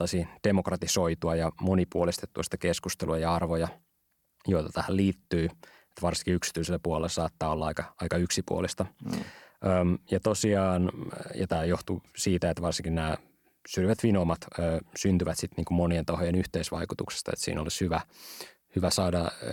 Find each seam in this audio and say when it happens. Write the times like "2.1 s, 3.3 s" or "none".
none